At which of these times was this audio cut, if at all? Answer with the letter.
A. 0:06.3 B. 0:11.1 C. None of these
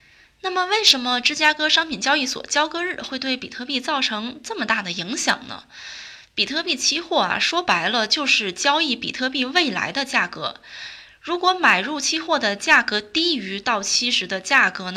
A